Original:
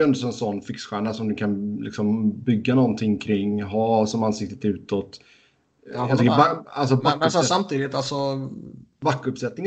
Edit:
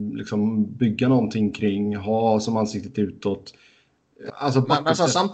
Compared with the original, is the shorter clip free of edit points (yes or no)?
no